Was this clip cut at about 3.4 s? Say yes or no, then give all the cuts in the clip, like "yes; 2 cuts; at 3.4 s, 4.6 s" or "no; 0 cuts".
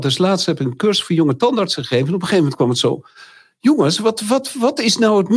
no; 0 cuts